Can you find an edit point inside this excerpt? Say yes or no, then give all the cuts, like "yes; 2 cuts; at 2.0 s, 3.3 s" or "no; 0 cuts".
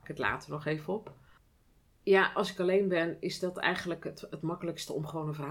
no; 0 cuts